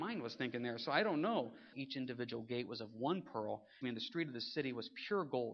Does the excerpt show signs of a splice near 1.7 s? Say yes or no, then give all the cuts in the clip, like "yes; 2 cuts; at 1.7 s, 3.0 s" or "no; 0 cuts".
yes; 2 cuts; at 1.7 s, 3.8 s